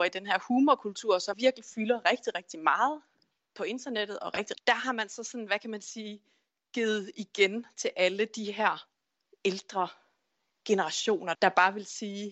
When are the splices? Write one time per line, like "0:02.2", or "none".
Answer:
0:01.3
0:04.5
0:11.3